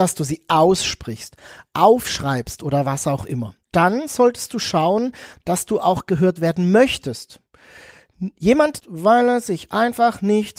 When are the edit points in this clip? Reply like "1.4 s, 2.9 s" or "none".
3.6 s, 8.8 s